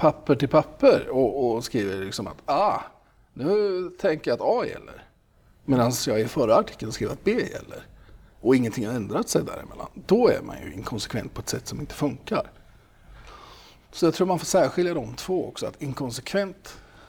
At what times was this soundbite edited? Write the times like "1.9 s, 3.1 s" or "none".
none

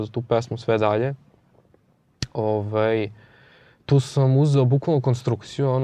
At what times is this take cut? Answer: none

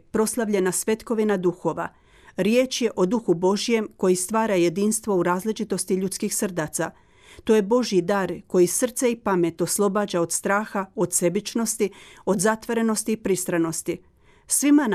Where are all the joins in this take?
none

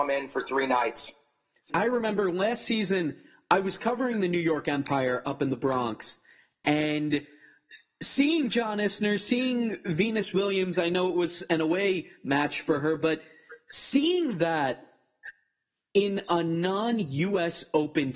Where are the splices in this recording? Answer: 1.7 s

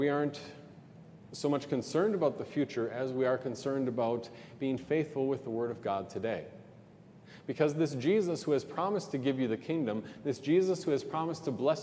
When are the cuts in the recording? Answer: none

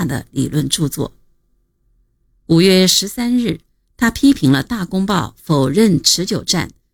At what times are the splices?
none

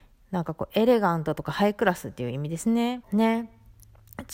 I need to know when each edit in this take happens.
3.0 s

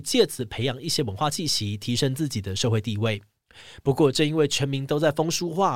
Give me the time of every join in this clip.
none

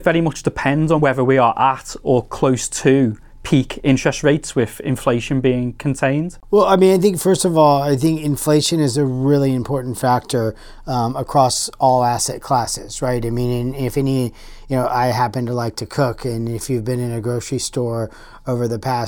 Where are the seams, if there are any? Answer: none

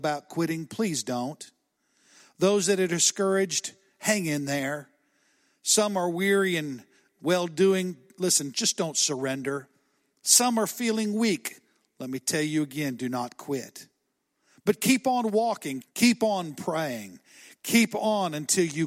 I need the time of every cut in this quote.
15.8 s

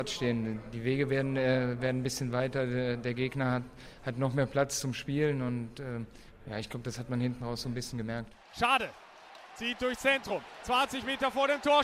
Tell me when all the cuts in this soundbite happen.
none

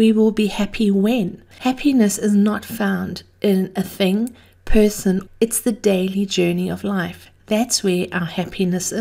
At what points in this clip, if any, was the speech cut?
1.5 s, 5.3 s

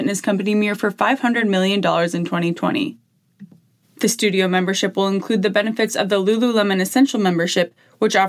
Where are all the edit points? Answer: none

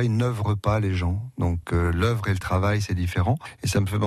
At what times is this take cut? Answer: none

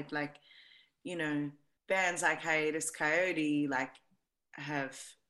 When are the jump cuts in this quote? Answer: 1.8 s

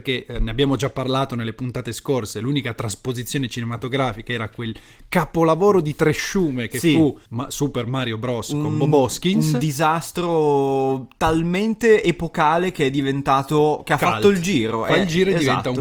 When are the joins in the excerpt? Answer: 7.3 s

